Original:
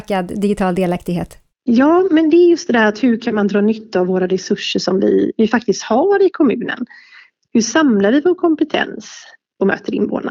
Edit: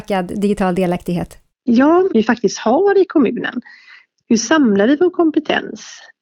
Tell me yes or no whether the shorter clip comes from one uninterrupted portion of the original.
no